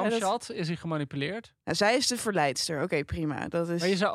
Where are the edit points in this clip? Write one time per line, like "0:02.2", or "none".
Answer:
0:01.6

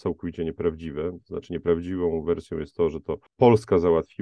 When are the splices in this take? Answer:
0:03.3

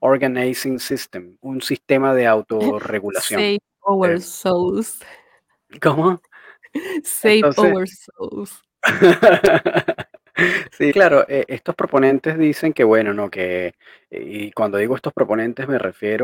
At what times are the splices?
0:01.4
0:10.9

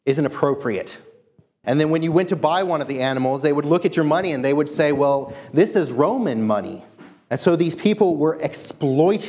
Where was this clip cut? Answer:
0:01.6
0:07.3

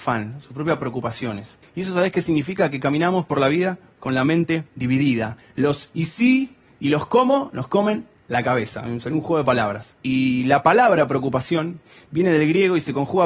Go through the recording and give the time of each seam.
0:01.6
0:04.7
0:09.9

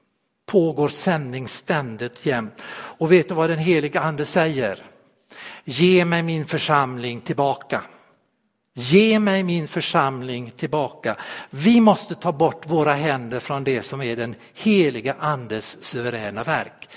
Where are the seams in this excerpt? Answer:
none

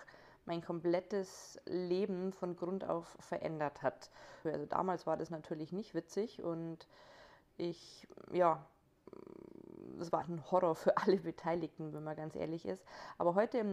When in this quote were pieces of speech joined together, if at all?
0:04.5
0:10.2

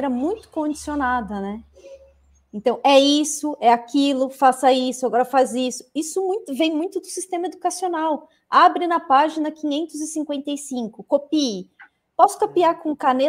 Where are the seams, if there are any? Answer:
none

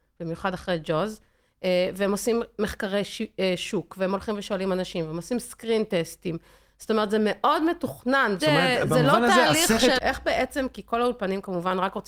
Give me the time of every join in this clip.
0:08.4
0:10.0

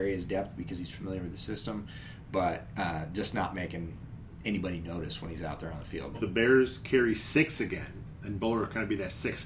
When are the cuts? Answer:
0:06.1

